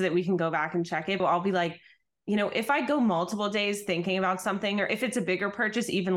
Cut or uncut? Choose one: cut